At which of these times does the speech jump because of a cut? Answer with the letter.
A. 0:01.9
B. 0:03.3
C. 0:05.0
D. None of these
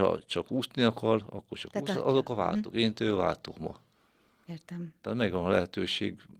A